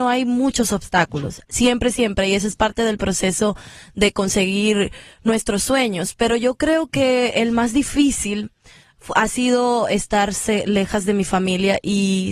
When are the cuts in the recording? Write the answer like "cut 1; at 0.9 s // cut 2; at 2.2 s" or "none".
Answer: none